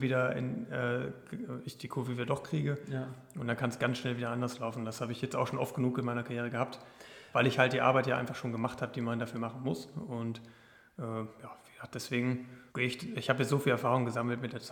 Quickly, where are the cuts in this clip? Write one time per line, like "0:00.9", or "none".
0:12.7

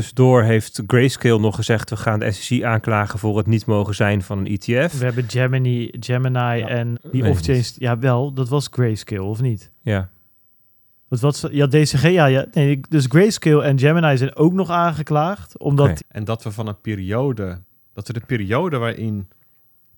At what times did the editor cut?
0:06.9
0:16.0

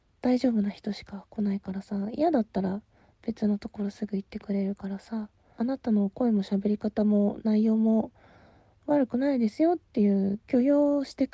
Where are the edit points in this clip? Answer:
0:05.6

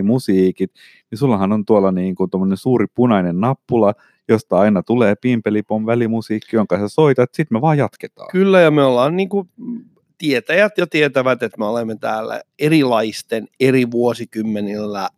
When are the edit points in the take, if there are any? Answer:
none

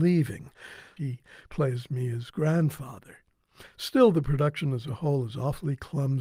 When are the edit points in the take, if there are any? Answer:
0:01.0

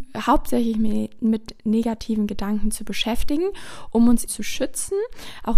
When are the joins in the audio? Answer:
0:04.3

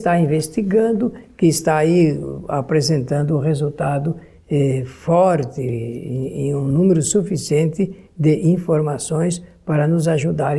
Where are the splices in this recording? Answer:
none

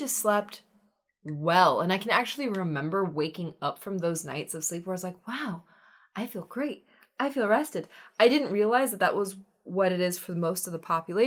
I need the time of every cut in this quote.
none

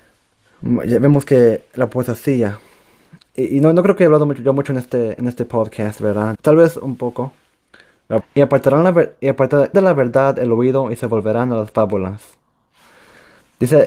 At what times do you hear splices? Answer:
0:06.3
0:08.2
0:09.7

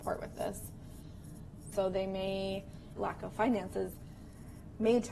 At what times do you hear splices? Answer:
0:01.7
0:03.0

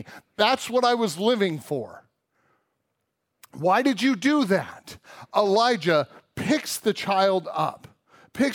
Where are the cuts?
none

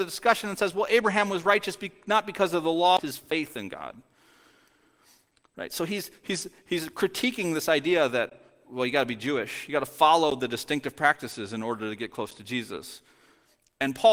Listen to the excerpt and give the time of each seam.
0:03.0

